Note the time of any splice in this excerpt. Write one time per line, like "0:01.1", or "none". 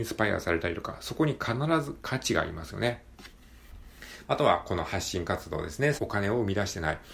0:04.2
0:06.0